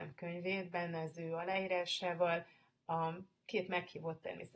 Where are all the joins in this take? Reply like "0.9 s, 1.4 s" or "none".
none